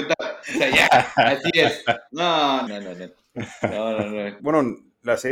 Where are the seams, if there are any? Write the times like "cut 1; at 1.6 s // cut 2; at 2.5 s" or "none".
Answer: cut 1; at 2.7 s // cut 2; at 4.4 s

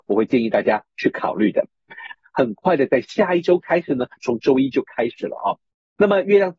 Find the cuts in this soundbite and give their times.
cut 1; at 2.2 s // cut 2; at 4.2 s

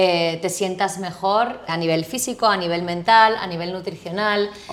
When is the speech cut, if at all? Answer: cut 1; at 1.7 s

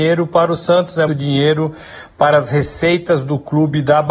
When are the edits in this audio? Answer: cut 1; at 1.1 s

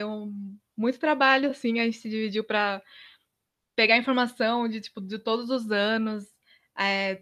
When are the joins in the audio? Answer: none

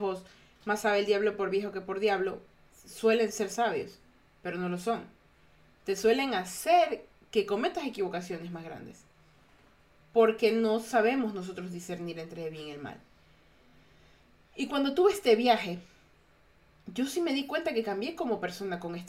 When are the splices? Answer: none

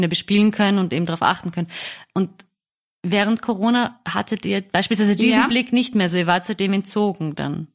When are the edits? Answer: none

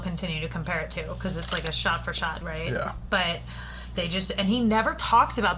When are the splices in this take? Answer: cut 1; at 2.4 s // cut 2; at 3.9 s

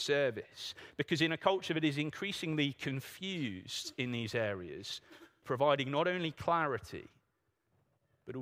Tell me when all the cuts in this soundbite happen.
cut 1; at 5.4 s

